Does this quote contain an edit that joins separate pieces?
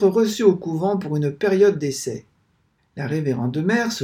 yes; 1 cut; at 2.8 s

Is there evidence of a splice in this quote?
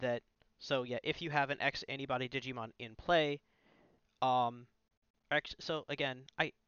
no; 0 cuts

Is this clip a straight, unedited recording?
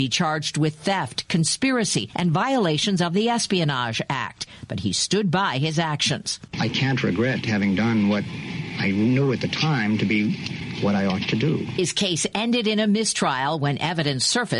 yes; 0 cuts

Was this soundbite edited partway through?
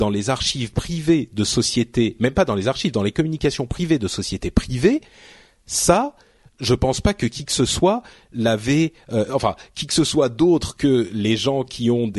no; 0 cuts

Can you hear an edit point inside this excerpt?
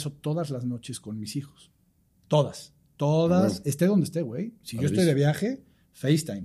no; 0 cuts

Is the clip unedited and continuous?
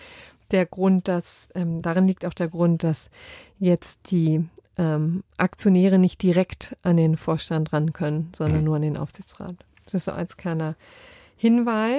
yes; 0 cuts

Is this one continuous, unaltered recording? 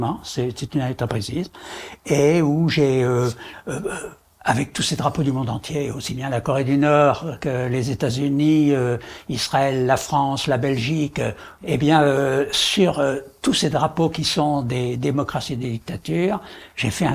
no; 1 cut; at 11.6 s

